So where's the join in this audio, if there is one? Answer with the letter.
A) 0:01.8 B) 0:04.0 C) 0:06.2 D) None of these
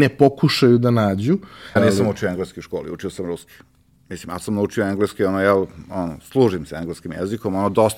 A